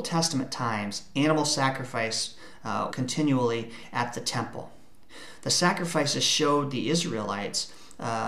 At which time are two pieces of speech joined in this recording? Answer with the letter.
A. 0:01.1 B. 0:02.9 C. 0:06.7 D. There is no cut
B